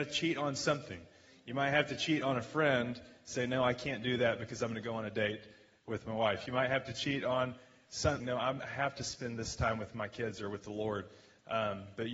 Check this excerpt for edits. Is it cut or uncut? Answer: cut